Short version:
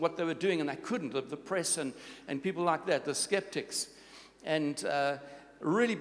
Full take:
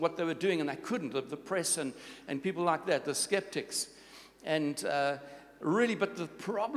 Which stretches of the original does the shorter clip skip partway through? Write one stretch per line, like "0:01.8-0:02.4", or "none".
none